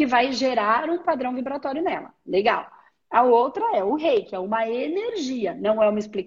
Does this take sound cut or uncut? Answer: uncut